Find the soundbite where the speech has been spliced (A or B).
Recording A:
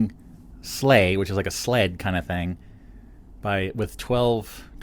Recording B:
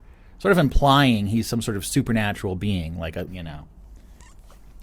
B